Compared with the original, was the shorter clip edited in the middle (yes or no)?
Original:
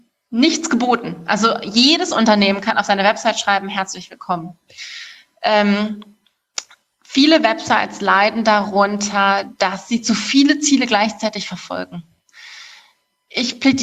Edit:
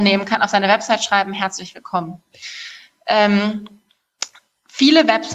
no